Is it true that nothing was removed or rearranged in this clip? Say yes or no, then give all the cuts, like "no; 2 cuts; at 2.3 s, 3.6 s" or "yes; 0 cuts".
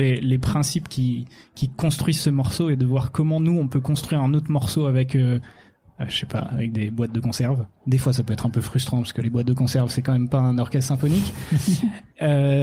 yes; 0 cuts